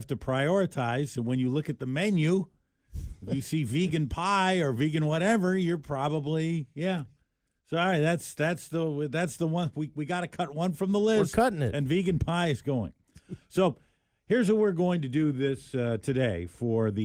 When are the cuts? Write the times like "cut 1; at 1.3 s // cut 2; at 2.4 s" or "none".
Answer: none